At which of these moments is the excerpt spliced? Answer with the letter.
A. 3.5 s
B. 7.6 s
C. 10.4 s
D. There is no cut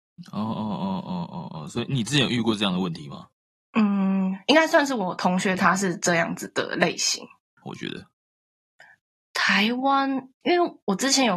B